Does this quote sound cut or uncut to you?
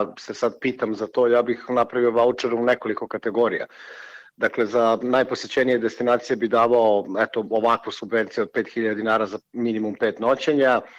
uncut